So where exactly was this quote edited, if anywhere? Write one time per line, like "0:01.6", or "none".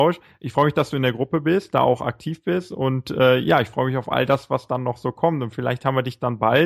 none